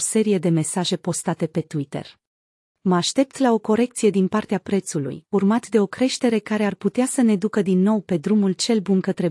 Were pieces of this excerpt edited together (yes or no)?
yes